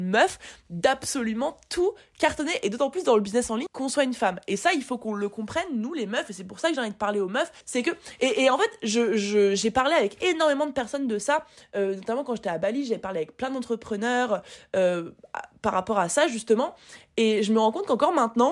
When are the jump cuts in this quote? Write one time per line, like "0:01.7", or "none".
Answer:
0:03.7
0:07.6